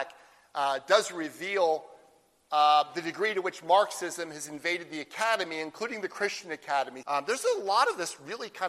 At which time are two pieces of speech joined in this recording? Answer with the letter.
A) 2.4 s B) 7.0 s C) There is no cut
B